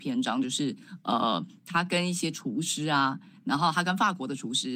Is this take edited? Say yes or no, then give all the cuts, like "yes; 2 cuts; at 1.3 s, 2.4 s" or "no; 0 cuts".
no; 0 cuts